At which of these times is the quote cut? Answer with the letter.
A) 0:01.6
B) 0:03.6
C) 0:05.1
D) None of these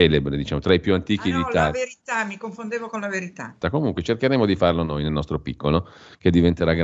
B